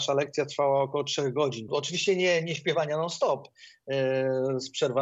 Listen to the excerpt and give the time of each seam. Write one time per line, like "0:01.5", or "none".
0:01.7